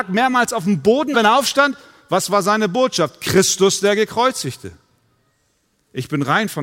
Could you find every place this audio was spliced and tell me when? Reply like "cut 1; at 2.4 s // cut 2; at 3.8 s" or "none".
cut 1; at 1.1 s